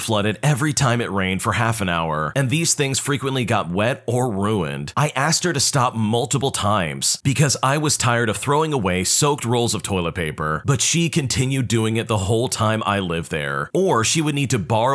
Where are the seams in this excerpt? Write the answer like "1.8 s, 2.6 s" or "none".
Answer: 13.7 s

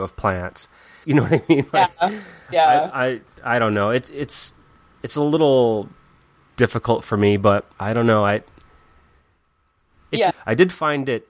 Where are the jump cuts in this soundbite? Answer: 1.0 s, 7.7 s, 10.3 s

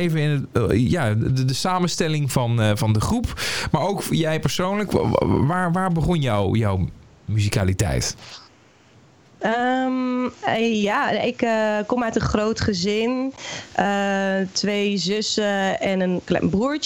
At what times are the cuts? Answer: none

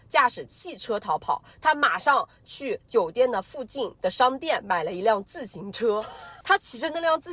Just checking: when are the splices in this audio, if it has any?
6.4 s

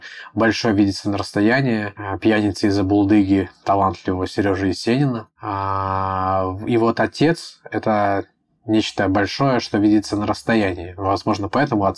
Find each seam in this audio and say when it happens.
none

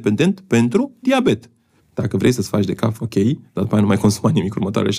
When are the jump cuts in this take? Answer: 1.8 s, 3.0 s

